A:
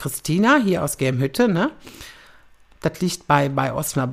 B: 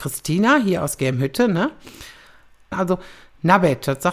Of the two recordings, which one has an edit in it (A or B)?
B